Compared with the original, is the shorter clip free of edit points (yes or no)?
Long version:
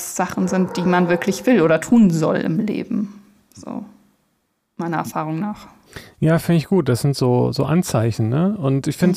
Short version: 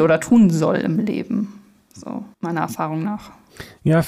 no